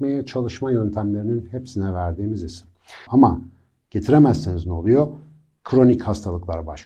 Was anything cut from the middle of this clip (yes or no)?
yes